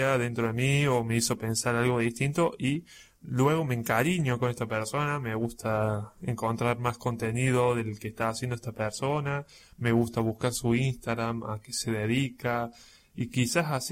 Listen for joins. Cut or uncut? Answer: uncut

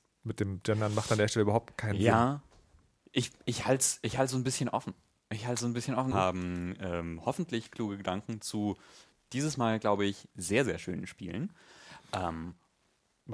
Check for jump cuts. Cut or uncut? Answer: cut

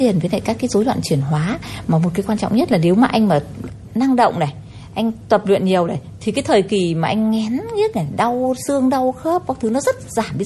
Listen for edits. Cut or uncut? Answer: cut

